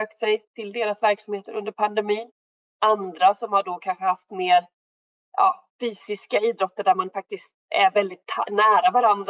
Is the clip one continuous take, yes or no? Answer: yes